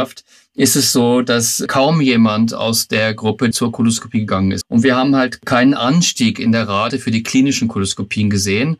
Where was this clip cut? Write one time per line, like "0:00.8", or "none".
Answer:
0:03.5
0:04.6